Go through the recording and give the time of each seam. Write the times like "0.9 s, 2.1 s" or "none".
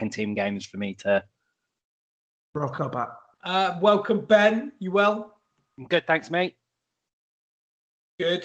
3.3 s

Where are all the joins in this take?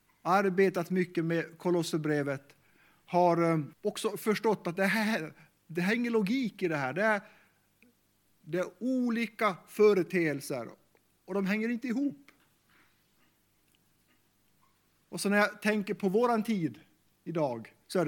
3.7 s

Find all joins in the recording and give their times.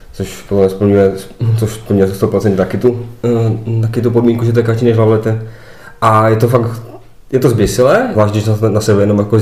8.1 s

